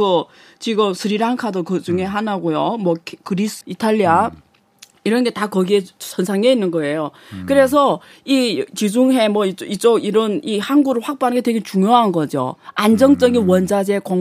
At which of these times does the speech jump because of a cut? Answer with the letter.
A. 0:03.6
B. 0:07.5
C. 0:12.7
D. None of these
A